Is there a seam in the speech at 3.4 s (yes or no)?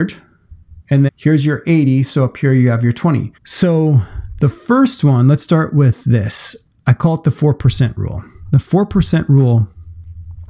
yes